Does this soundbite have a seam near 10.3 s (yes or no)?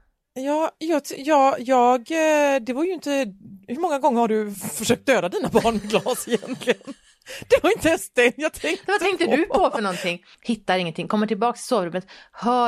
yes